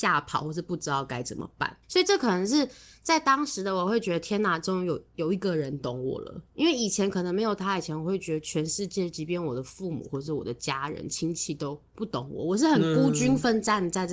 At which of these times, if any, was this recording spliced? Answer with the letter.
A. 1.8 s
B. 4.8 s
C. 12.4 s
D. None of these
A